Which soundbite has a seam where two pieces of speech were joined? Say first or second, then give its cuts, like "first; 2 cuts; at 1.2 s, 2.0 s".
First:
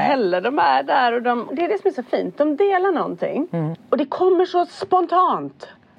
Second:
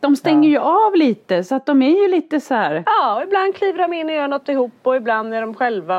first; 2 cuts; at 1.5 s, 3.7 s